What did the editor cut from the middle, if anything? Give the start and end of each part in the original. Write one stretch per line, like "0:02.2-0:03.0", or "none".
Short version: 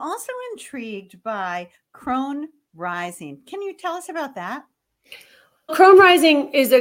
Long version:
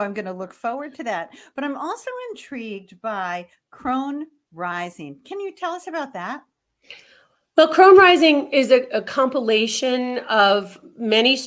0:07.5-0:07.7